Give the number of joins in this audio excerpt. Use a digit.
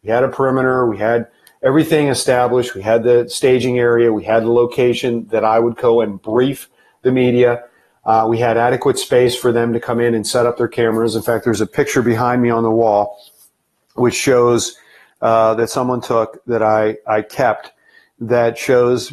0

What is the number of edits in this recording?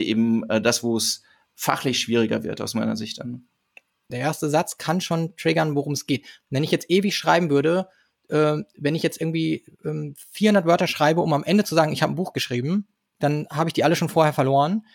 1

